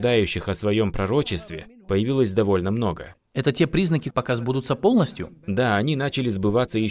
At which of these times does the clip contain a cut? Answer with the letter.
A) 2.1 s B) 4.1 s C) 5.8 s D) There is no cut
B